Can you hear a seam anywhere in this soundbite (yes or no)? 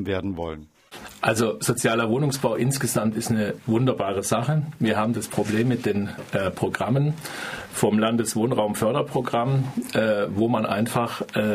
no